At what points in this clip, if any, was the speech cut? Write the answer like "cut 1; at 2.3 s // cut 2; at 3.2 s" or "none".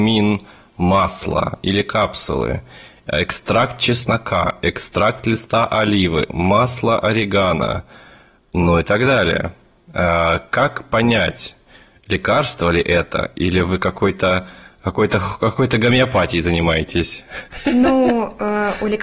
none